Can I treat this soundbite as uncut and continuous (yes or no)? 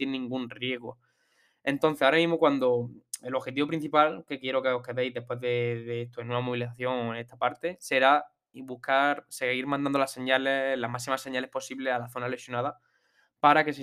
yes